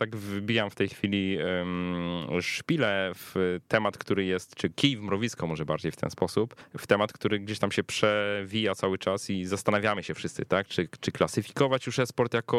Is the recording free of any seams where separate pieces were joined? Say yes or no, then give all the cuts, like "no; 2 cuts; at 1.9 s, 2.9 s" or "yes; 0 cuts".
yes; 0 cuts